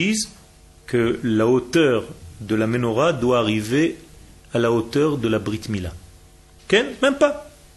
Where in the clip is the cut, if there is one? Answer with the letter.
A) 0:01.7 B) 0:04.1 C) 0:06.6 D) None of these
C